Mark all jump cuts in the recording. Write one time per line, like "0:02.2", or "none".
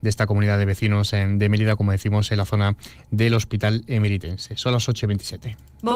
none